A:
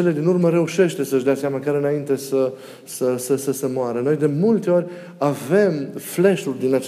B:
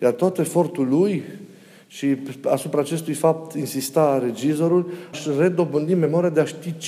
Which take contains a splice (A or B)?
B